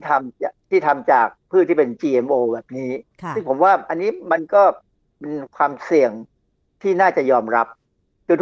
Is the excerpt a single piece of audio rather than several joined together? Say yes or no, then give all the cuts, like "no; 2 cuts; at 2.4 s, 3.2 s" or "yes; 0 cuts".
yes; 0 cuts